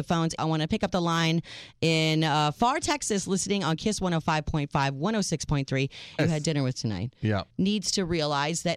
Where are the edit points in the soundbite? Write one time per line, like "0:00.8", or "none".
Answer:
0:06.2
0:07.5